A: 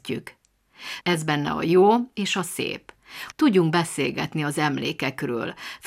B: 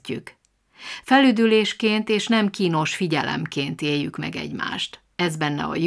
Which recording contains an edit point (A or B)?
A